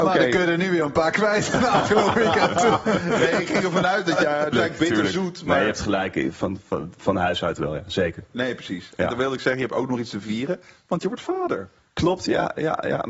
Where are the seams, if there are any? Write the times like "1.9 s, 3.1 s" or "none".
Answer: 4.5 s